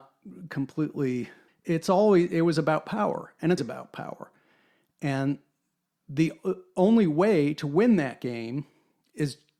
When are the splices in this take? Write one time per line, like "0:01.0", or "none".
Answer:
0:01.5
0:03.6